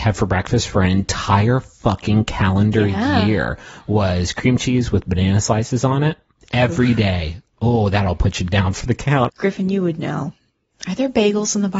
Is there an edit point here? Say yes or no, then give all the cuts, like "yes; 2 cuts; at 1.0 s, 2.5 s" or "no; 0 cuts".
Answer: yes; 1 cut; at 9.3 s